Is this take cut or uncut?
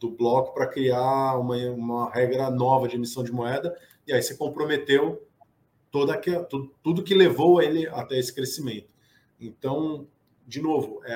uncut